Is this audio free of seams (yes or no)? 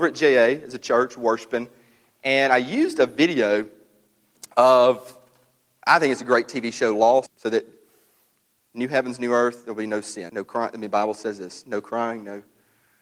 no